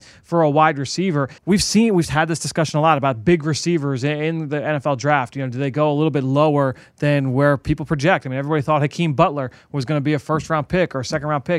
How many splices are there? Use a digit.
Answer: 1